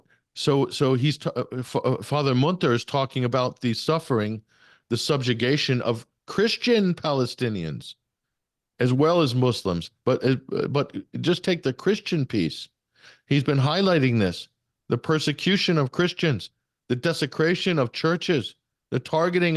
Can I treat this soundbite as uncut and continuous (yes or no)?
yes